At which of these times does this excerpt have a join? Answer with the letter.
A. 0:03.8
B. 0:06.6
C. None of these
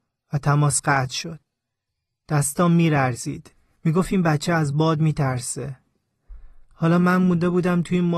A